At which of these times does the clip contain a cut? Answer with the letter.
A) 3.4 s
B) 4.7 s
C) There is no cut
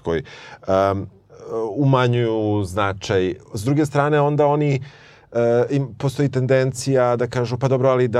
C